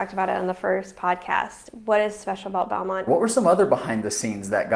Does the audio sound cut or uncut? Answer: cut